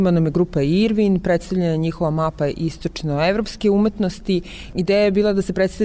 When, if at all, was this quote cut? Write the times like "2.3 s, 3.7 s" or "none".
none